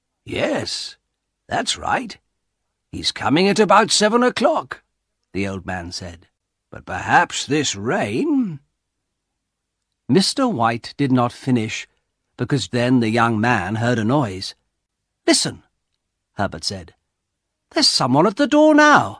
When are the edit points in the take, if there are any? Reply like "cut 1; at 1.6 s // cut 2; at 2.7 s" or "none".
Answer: cut 1; at 12.7 s

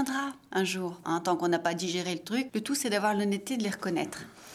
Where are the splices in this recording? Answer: cut 1; at 1.0 s // cut 2; at 2.5 s

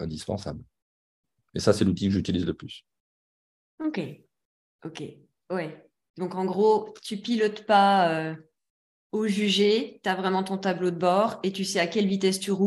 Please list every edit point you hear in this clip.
none

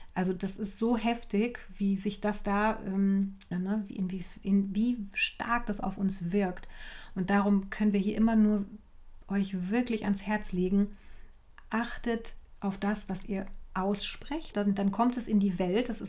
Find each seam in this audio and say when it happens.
cut 1; at 3.5 s // cut 2; at 14.5 s

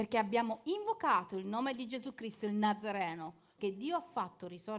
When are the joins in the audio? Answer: cut 1; at 3.6 s

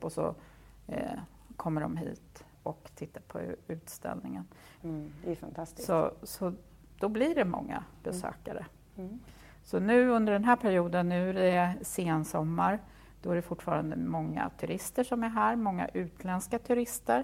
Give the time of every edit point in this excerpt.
cut 1; at 4.8 s

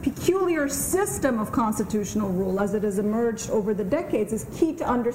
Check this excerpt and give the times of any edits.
none

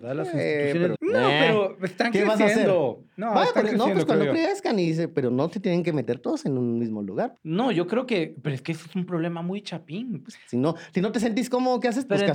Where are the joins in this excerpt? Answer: cut 1; at 0.9 s // cut 2; at 7.4 s // cut 3; at 10.2 s

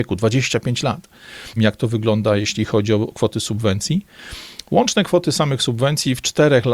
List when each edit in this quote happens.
cut 1; at 1.6 s

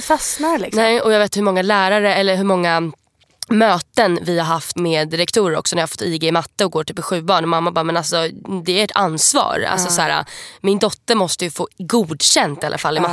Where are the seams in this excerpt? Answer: cut 1; at 4.8 s

